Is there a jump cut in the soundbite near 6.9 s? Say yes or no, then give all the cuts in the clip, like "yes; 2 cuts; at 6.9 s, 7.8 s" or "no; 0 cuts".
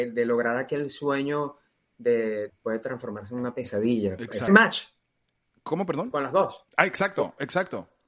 no; 2 cuts; at 2.5 s, 4.5 s